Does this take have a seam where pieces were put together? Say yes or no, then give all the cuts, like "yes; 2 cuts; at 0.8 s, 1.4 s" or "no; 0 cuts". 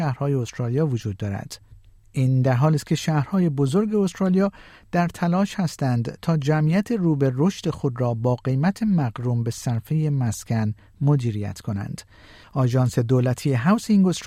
yes; 1 cut; at 12.4 s